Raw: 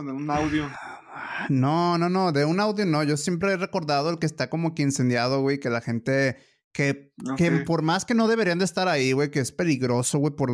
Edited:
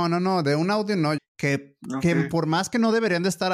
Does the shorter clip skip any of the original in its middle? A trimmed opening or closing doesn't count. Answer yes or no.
yes